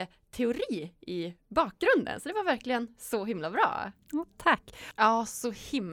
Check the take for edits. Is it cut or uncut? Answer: cut